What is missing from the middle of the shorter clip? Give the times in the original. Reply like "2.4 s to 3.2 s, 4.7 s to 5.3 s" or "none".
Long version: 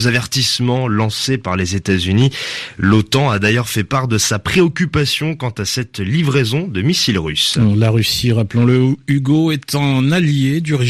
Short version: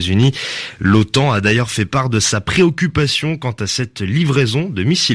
none